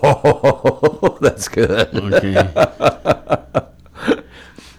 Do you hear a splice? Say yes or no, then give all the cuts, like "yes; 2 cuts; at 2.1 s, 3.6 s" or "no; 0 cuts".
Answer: no; 0 cuts